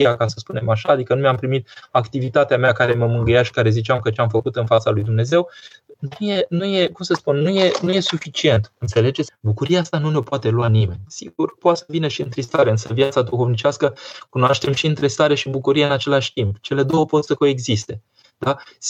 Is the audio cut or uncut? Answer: cut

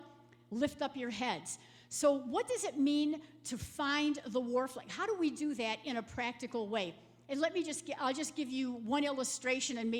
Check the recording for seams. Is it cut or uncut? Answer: uncut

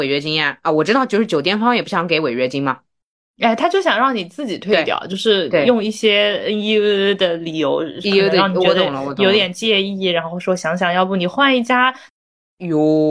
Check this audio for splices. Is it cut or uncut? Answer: cut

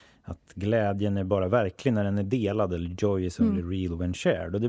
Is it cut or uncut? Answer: uncut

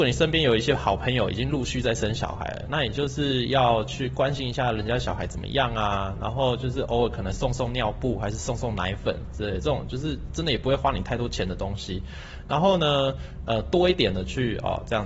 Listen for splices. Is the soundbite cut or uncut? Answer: uncut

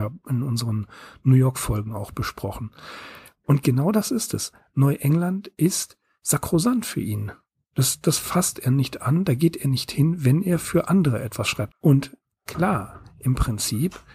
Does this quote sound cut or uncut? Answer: cut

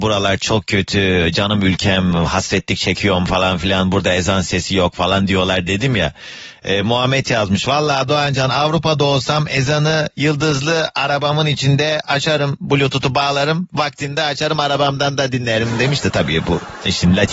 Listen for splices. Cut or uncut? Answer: uncut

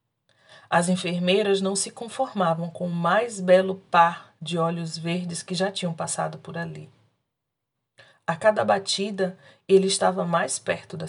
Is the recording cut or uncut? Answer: cut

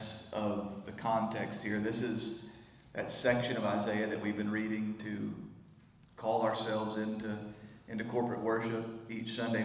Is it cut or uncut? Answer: uncut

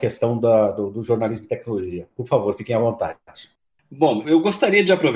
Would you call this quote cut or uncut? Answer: cut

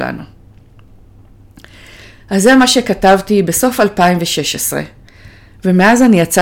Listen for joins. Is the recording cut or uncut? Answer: uncut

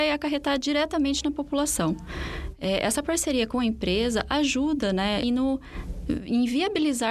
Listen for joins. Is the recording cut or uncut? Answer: cut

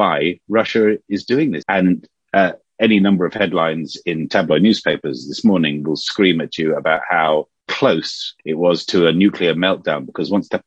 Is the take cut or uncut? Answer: cut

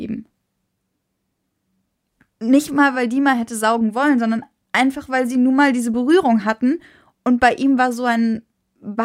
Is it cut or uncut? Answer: uncut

